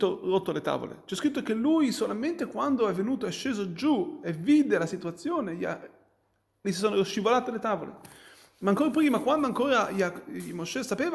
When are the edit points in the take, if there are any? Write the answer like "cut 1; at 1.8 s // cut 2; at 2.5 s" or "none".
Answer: none